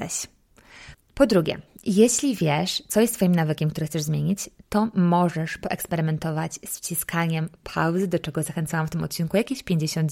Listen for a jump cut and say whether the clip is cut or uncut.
cut